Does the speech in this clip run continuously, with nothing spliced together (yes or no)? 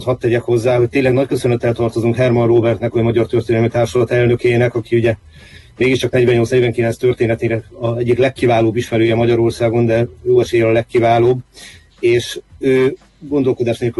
yes